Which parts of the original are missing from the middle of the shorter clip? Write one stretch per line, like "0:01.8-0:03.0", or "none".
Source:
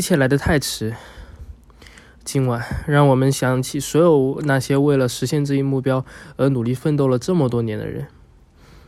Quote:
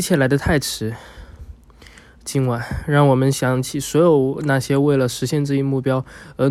none